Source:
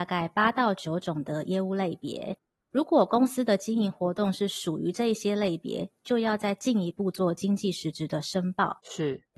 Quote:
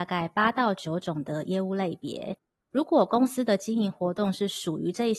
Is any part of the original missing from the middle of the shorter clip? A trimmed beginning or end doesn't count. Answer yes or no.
no